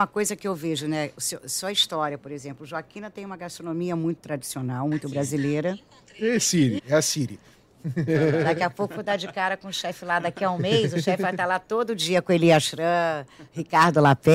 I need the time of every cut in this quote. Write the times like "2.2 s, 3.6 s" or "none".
6.8 s, 8.1 s